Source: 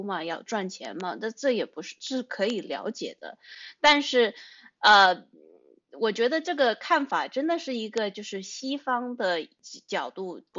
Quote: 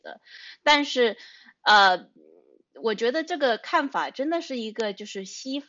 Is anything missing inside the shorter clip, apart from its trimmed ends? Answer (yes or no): no